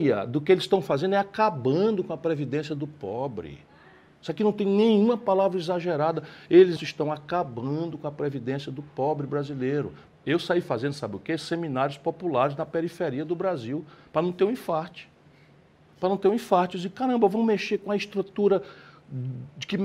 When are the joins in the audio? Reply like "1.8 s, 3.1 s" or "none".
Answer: 6.8 s, 10.1 s